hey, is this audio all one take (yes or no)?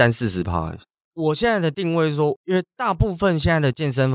no